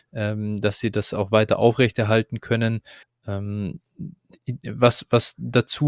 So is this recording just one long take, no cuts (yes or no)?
yes